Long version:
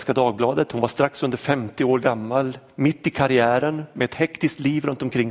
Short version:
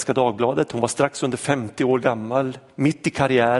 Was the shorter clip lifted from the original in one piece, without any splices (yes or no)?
yes